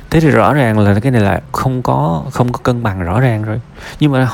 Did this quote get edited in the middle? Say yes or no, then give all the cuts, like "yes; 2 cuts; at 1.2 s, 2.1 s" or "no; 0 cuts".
yes; 1 cut; at 1.5 s